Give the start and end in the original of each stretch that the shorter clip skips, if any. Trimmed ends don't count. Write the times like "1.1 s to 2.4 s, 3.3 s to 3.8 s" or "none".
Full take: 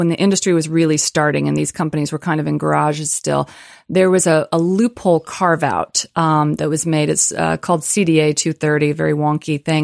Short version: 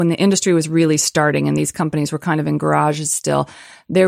none